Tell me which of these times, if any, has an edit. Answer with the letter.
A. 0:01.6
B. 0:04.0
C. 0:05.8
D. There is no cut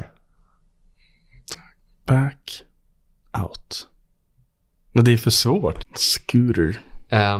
C